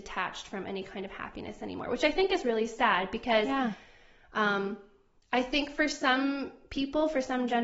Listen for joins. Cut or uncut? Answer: uncut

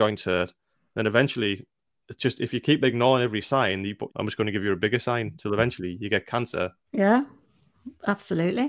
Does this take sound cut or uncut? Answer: cut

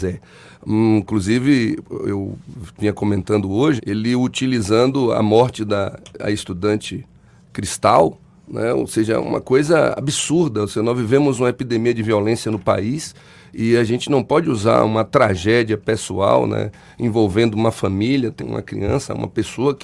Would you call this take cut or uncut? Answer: cut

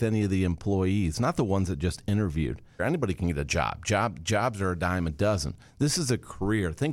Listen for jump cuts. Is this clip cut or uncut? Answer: cut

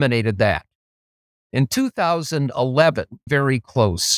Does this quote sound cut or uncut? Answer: cut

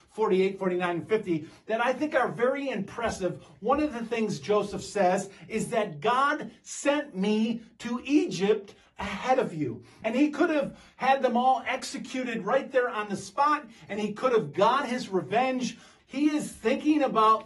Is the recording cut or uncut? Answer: cut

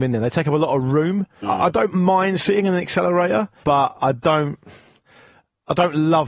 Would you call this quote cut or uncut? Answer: cut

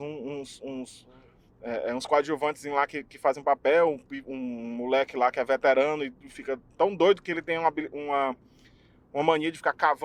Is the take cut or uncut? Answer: uncut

